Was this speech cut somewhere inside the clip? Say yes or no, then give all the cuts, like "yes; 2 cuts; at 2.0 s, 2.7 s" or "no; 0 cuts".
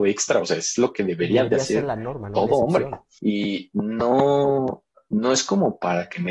yes; 1 cut; at 3.2 s